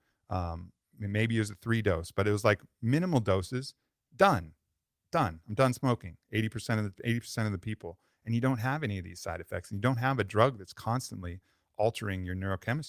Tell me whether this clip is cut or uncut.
uncut